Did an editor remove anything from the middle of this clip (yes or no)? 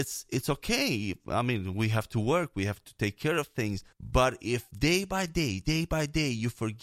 yes